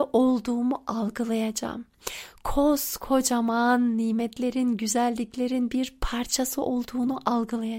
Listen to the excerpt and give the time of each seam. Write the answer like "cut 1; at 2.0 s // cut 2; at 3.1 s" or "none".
none